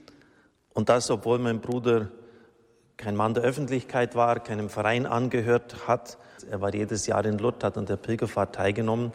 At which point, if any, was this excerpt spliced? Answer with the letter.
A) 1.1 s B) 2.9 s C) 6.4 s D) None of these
C